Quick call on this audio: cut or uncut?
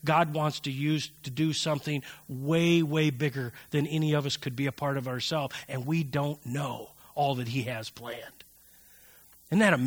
uncut